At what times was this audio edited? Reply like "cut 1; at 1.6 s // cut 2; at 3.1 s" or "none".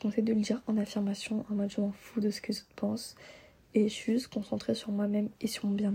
none